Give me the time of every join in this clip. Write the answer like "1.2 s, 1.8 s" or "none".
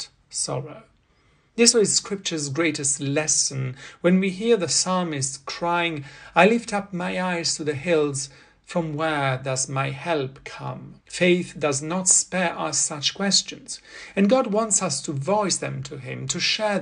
1.7 s, 11.0 s